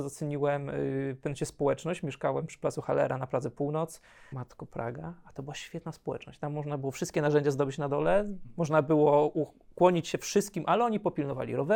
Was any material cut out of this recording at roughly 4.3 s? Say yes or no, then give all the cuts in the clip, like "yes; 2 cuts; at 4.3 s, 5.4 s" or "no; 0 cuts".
yes; 1 cut; at 4.3 s